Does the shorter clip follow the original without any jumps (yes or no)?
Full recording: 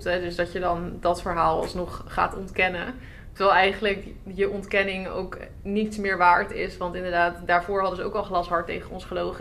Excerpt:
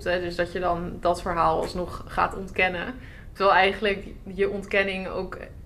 yes